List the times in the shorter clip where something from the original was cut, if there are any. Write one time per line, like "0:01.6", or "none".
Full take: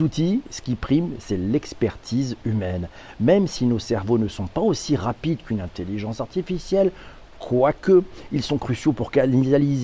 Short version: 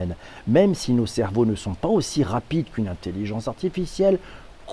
none